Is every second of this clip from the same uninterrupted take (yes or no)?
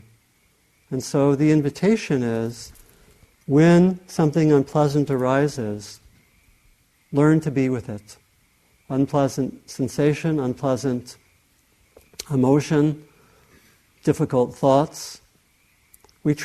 yes